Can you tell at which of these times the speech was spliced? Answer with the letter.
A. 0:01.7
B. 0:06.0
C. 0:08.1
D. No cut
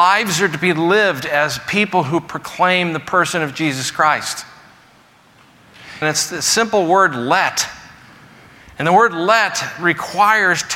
B